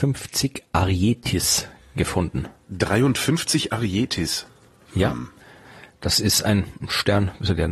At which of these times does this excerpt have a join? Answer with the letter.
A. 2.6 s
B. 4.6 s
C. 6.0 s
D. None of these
D